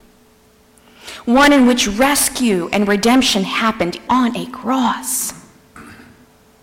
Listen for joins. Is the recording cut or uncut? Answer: cut